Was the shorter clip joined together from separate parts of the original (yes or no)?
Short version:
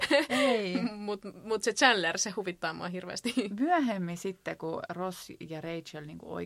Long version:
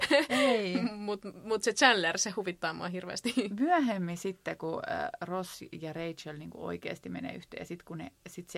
yes